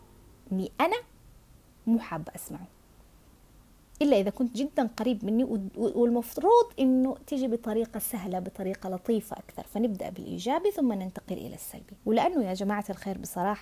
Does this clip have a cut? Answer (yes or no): yes